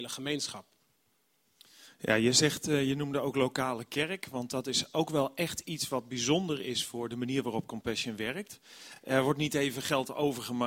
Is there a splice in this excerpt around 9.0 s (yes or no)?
no